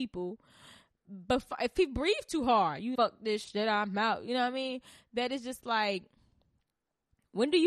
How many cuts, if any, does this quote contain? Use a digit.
1